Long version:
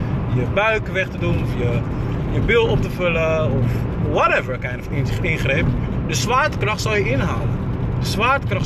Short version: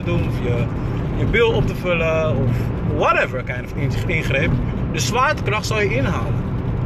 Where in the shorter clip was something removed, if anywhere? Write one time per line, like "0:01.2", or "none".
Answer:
none